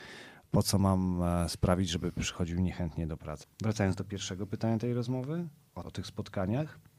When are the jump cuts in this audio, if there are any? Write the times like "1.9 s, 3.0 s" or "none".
3.4 s, 5.8 s